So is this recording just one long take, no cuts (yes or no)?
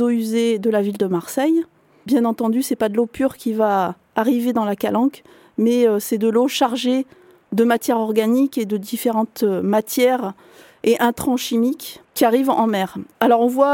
no